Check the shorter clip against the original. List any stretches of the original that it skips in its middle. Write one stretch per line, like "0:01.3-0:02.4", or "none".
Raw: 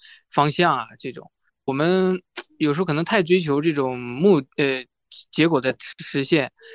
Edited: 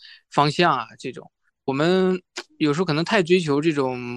none